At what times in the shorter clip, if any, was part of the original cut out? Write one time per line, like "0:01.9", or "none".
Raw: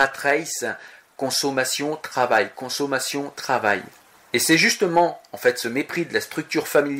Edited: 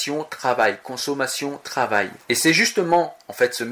0:02.2